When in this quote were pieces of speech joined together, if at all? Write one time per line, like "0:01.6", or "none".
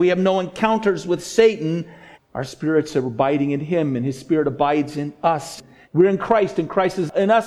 0:02.1
0:05.8